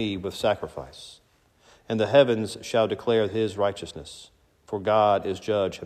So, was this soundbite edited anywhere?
no; 0 cuts

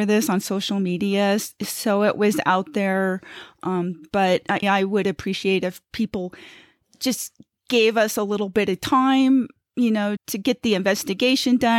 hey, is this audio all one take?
no; 2 cuts; at 4.6 s, 10.2 s

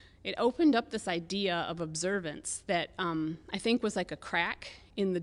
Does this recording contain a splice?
no; 0 cuts

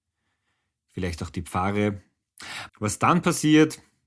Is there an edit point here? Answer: yes; 1 cut; at 2.7 s

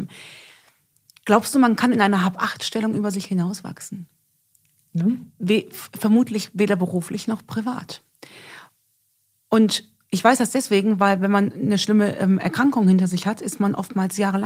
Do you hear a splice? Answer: yes; 1 cut; at 4.9 s

